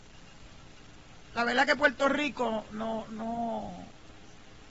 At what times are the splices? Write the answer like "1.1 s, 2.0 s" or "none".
none